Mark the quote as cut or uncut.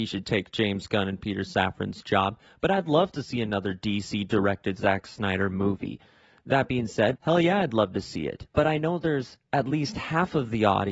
cut